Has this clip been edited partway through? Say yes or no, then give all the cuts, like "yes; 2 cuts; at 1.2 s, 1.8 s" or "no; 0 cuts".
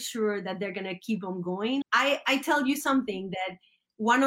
yes; 1 cut; at 1.8 s